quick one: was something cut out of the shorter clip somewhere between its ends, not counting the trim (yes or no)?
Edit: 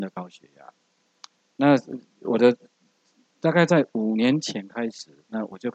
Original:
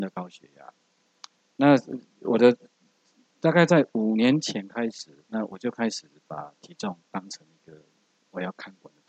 no